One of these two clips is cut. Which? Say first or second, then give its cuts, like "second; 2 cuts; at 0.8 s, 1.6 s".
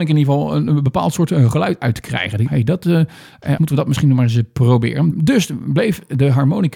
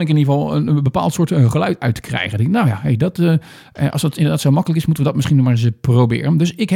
first; 3 cuts; at 2.5 s, 3.6 s, 5.1 s